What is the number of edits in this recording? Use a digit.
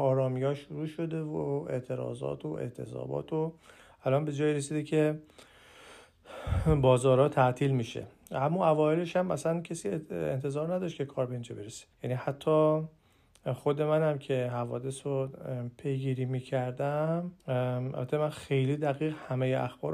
2